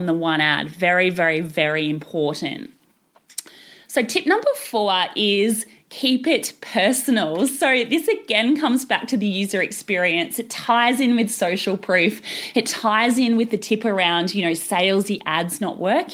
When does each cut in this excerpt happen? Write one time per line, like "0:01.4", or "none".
none